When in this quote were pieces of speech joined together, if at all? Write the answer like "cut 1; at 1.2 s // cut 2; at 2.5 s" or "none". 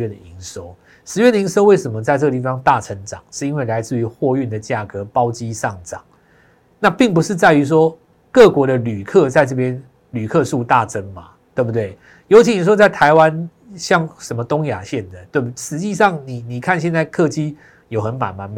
none